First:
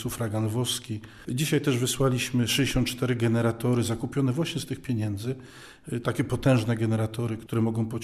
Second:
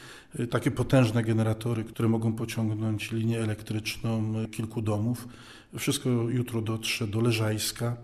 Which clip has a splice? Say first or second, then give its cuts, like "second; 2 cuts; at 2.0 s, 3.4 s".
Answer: first; 1 cut; at 1.2 s